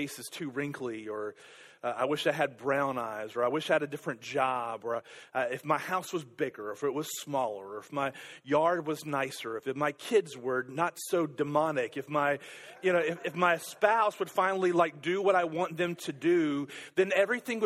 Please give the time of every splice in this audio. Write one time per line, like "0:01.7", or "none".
none